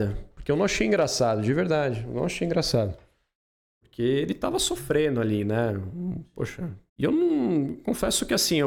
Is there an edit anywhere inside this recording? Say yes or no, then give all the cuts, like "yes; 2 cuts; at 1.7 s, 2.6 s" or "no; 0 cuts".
yes; 1 cut; at 6.9 s